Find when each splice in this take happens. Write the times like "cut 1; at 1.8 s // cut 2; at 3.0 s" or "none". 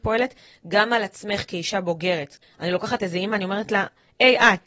cut 1; at 2.4 s

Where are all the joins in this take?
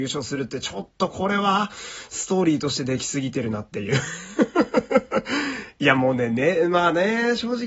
none

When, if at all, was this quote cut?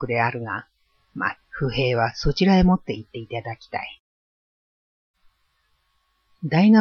cut 1; at 1.4 s

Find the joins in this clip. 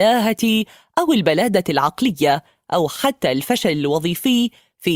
none

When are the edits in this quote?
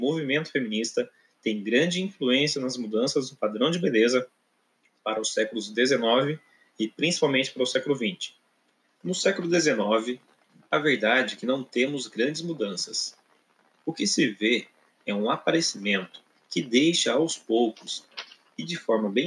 cut 1; at 9.0 s // cut 2; at 16.3 s

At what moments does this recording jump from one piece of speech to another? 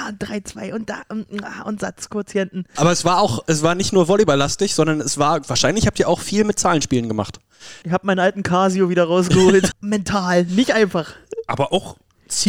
cut 1; at 2.8 s // cut 2; at 7.8 s // cut 3; at 9.7 s

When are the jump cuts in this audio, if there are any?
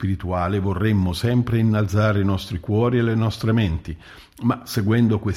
none

